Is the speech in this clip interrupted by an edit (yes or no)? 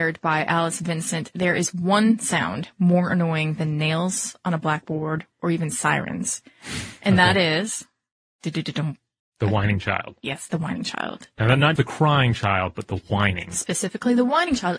yes